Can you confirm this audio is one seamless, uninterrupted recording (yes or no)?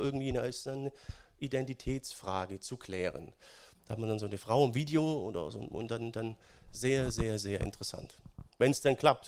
no